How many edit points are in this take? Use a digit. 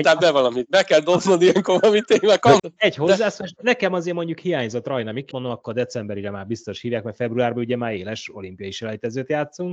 2